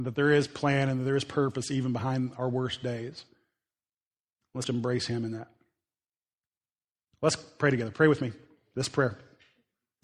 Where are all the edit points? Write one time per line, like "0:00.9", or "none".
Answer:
0:04.6